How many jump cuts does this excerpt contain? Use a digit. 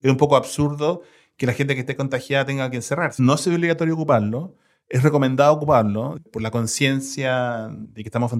1